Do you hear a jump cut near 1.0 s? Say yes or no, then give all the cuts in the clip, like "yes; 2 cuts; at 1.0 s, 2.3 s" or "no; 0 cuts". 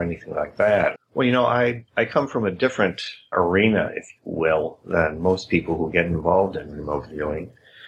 yes; 2 cuts; at 1.0 s, 3.3 s